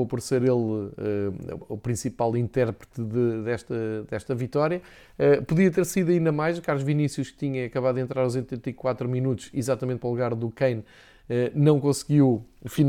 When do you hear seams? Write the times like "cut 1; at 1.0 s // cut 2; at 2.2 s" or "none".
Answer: none